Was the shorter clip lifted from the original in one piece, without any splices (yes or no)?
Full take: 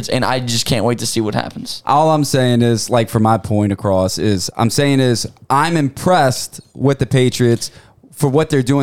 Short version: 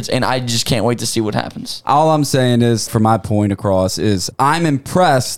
no